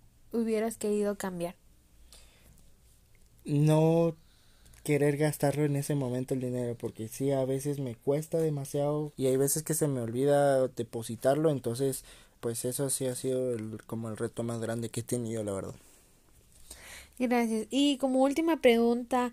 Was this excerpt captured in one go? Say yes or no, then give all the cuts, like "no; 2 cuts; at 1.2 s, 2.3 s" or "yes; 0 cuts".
no; 2 cuts; at 9.1 s, 12.4 s